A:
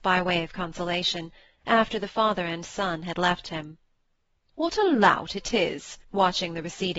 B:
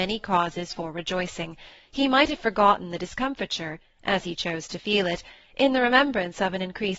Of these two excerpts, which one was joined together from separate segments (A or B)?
A